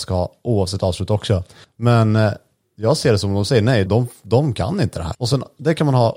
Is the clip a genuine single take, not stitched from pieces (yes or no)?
no